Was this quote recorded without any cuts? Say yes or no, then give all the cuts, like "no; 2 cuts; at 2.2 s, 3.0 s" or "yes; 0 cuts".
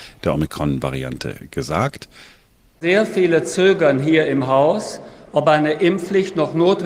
yes; 0 cuts